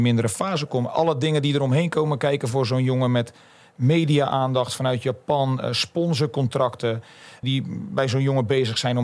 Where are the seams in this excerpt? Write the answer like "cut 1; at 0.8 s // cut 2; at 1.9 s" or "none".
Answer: cut 1; at 7.4 s